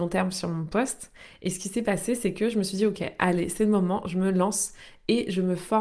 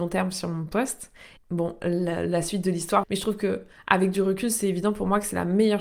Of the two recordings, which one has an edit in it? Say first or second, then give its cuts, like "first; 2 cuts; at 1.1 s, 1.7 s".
second; 2 cuts; at 1.4 s, 3.0 s